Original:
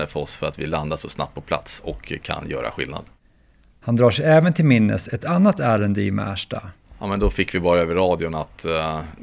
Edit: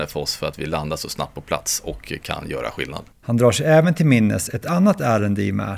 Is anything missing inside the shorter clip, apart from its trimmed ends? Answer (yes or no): yes